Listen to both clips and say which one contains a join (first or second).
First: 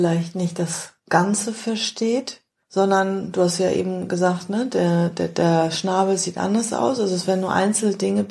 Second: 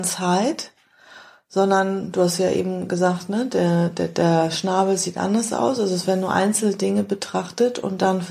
first